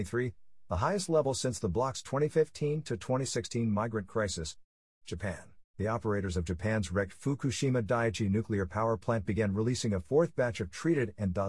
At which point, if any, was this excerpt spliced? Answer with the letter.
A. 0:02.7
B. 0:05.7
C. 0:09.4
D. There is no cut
B